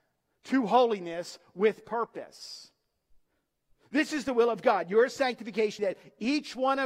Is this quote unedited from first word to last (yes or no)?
no